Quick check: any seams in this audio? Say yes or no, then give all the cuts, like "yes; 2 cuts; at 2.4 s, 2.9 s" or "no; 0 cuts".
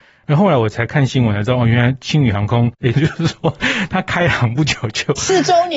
yes; 1 cut; at 2.9 s